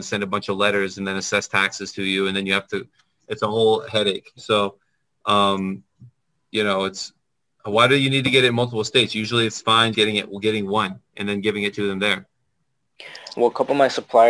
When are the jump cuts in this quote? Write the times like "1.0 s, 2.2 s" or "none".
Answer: 9.9 s